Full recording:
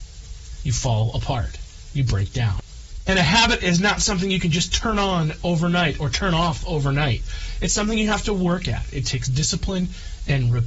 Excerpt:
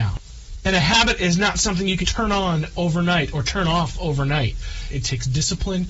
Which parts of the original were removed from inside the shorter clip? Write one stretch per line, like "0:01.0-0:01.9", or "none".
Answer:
0:04.4-0:04.7
0:07.6-0:08.9